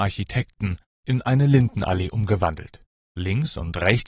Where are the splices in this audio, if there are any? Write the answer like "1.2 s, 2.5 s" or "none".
1.0 s